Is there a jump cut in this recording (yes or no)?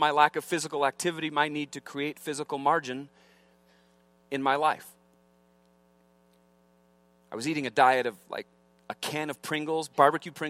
no